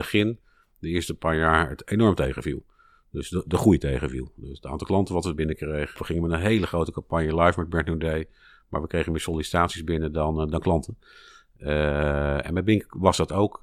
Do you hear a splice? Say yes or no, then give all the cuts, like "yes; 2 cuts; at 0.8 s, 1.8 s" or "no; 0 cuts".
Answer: yes; 1 cut; at 6.0 s